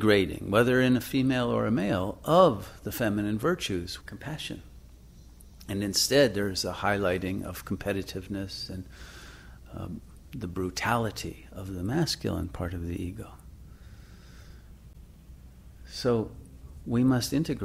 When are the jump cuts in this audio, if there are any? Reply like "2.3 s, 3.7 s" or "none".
4.0 s

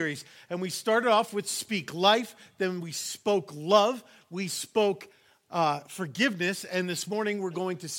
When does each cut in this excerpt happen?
none

